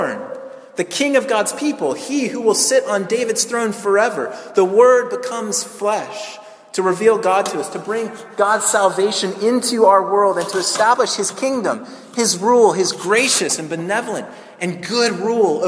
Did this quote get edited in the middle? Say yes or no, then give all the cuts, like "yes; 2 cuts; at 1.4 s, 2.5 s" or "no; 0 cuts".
no; 0 cuts